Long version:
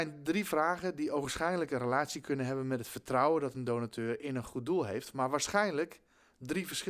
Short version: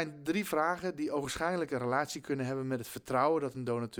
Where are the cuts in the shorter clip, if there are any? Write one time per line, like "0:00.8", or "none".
none